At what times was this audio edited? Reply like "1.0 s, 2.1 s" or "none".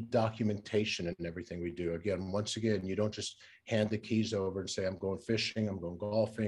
none